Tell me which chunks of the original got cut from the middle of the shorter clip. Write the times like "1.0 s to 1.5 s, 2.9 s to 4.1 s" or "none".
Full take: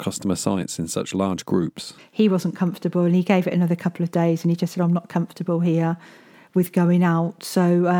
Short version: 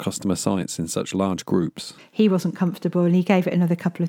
none